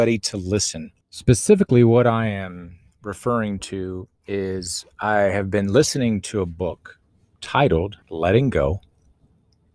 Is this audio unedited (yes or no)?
no